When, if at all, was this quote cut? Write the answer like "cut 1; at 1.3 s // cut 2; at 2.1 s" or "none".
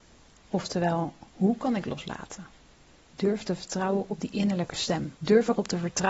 cut 1; at 5.2 s